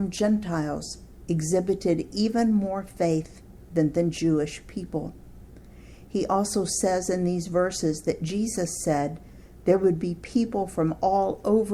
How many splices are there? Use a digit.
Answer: 0